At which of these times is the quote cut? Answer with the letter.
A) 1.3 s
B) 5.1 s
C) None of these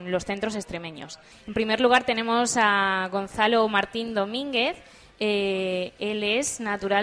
A